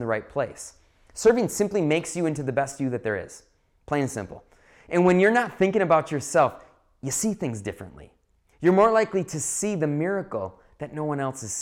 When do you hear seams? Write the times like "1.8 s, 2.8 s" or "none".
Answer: none